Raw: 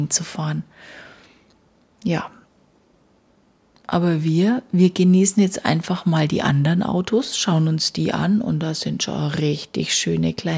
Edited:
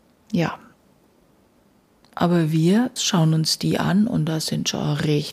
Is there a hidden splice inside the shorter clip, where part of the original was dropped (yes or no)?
yes